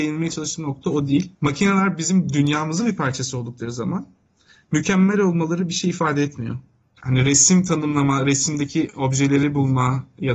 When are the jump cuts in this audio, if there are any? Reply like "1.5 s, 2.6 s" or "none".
1.3 s, 7.0 s